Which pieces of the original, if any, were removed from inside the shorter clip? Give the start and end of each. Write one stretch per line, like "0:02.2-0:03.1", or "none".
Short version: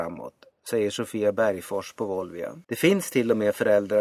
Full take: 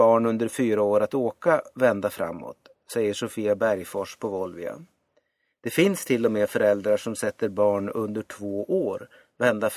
0:04.9-0:05.6